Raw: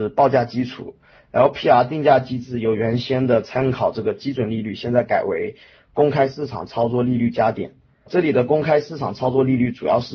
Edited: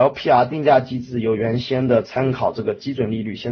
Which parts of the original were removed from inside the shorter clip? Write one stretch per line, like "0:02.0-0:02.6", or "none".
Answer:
none